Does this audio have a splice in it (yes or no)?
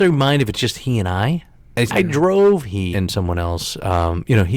yes